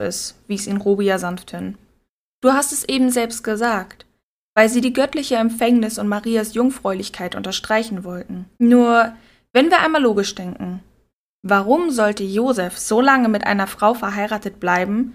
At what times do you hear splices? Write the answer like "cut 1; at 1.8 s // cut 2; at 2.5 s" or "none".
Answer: cut 1; at 8.5 s